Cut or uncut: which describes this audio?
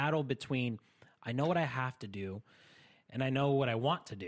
uncut